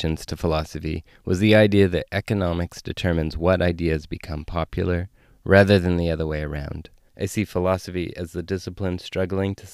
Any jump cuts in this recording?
yes; 1 cut; at 7.1 s

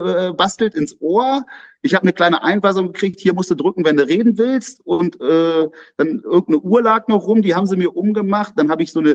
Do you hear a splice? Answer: no; 0 cuts

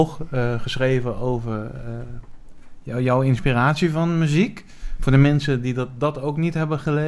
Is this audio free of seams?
yes; 0 cuts

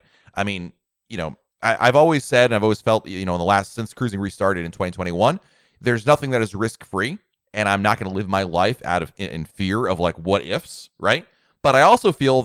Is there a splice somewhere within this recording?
no; 0 cuts

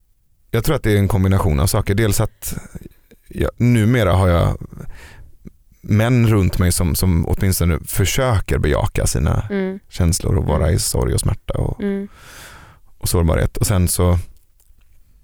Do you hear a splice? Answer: no; 0 cuts

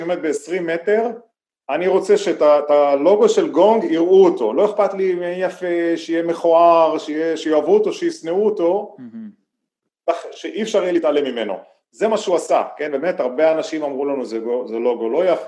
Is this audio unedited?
yes; 0 cuts

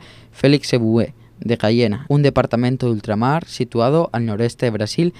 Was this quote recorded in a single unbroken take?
no; 1 cut; at 2.1 s

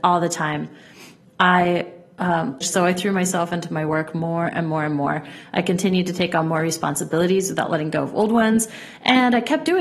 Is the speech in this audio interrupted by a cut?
yes; 1 cut; at 2.6 s

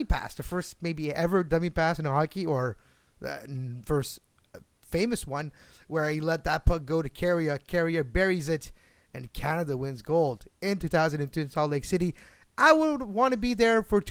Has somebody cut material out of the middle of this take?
no; 0 cuts

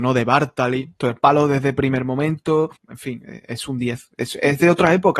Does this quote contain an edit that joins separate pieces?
yes; 2 cuts; at 1.0 s, 2.8 s

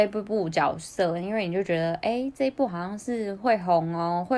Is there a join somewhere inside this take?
no; 0 cuts

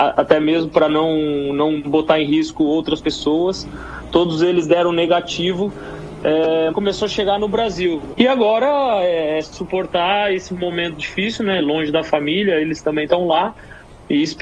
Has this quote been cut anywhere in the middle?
yes; 2 cuts; at 6.7 s, 8.1 s

